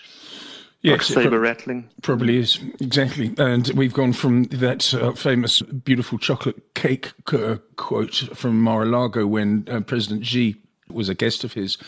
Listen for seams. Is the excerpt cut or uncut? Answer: cut